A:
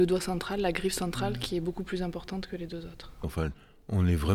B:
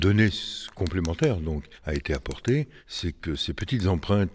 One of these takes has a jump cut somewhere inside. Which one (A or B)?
A